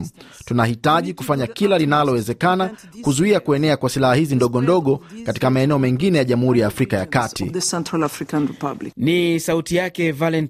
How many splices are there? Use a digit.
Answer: 0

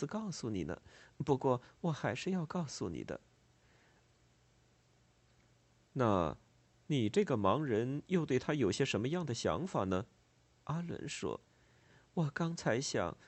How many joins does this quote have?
2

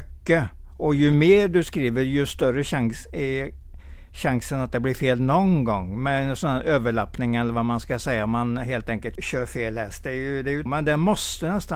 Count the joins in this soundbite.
2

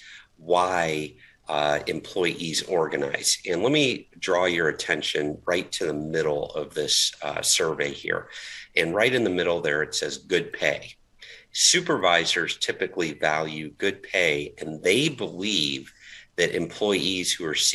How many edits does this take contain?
0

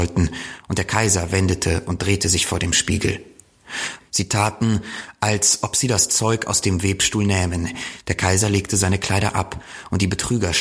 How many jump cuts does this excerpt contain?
2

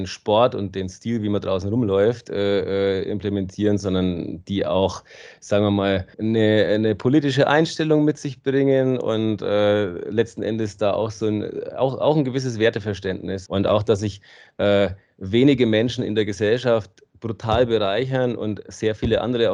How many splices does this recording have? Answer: 2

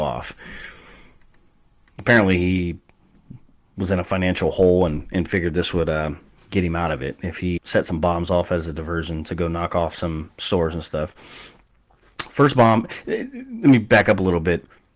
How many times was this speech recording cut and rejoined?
1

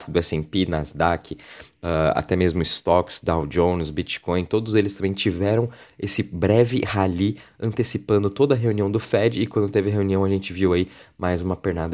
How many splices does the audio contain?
0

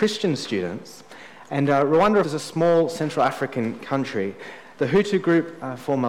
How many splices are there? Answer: 2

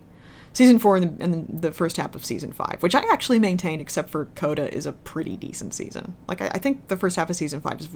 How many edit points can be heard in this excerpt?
0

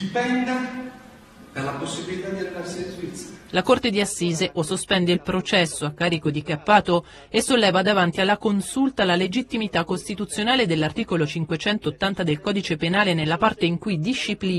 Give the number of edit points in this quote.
1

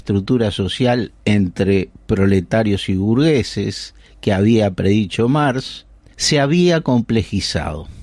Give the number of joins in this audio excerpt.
1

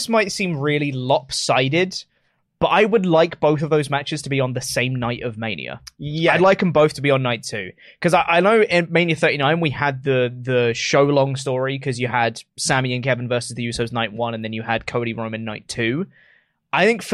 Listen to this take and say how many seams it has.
0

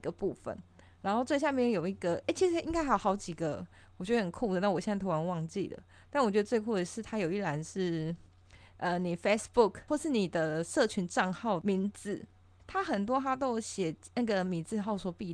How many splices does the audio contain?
0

